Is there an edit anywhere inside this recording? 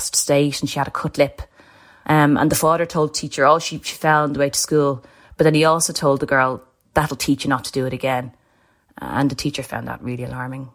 no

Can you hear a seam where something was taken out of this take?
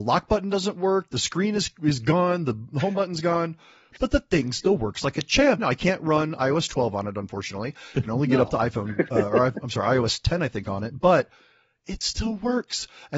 yes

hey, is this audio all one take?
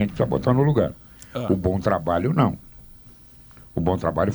yes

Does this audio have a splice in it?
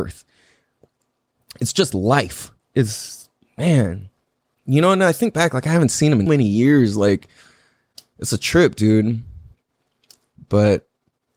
yes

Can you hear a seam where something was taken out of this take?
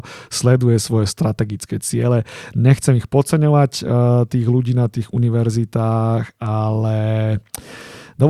no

